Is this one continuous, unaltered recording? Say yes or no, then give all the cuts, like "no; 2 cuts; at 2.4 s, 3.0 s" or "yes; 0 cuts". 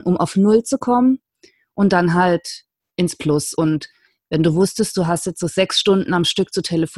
yes; 0 cuts